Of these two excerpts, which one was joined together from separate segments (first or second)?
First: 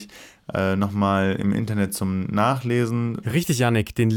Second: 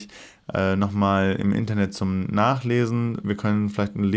first